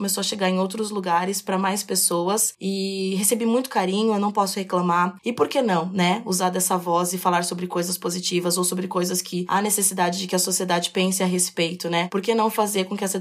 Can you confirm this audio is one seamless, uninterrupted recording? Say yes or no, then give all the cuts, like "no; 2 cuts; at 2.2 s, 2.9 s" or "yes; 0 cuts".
no; 1 cut; at 5.2 s